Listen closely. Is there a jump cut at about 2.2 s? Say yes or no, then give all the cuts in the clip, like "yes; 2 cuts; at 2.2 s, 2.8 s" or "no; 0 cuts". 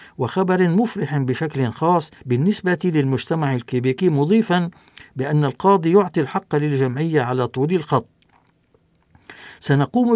yes; 1 cut; at 2.2 s